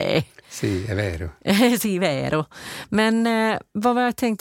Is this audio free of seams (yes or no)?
yes